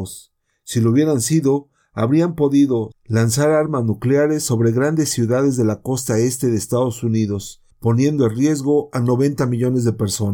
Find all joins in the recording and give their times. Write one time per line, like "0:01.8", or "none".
0:02.9
0:07.7

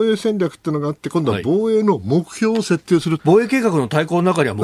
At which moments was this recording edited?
0:03.2

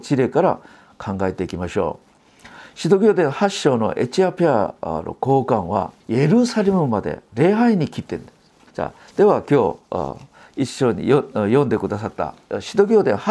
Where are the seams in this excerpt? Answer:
0:06.0
0:08.7

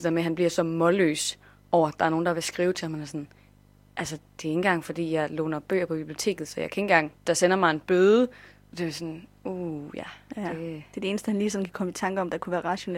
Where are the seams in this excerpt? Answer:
0:07.1

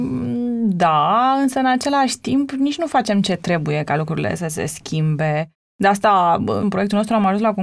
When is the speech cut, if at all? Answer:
0:06.6

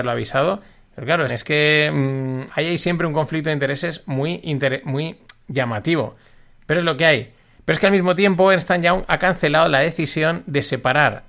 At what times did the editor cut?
0:01.3
0:02.5

